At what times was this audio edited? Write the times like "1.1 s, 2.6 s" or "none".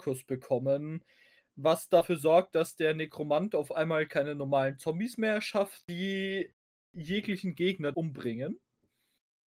5.8 s, 7.9 s